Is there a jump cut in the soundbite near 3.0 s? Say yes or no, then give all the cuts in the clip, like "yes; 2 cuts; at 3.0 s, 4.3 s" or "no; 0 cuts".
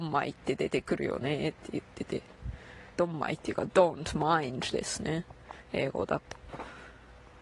yes; 1 cut; at 3.0 s